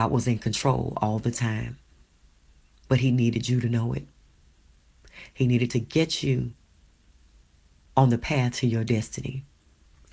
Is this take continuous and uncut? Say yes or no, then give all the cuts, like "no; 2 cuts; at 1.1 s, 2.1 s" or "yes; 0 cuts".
yes; 0 cuts